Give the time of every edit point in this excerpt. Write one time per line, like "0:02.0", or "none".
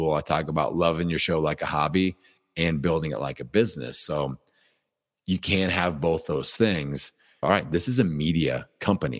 0:07.4